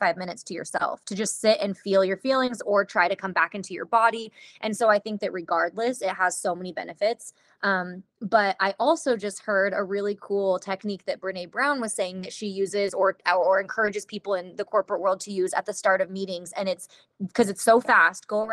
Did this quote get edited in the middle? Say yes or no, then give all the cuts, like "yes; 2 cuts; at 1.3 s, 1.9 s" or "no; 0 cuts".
no; 0 cuts